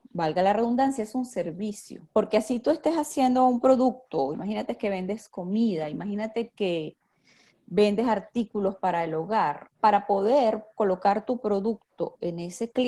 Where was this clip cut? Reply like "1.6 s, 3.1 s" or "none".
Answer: 2.1 s, 4.3 s, 9.7 s

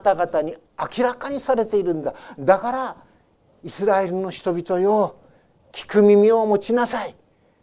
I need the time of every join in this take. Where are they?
none

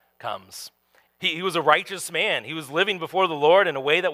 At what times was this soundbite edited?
1.1 s

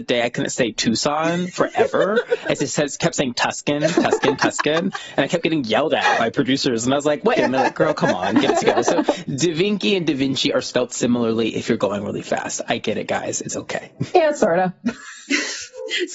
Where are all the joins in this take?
7.4 s

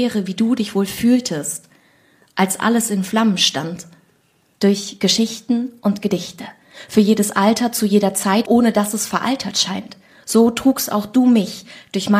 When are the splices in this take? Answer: 4.5 s, 8.4 s

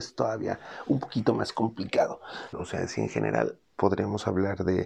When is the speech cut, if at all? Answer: 2.5 s, 3.7 s

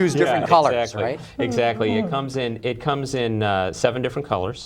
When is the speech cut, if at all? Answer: none

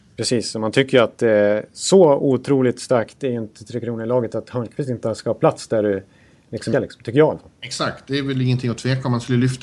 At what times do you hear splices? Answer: 6.7 s

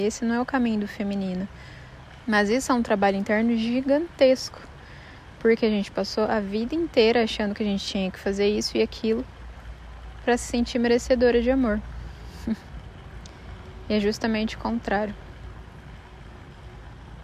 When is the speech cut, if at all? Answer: 2.2 s

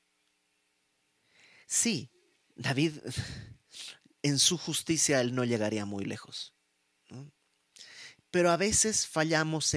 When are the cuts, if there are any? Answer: 7.0 s, 8.2 s

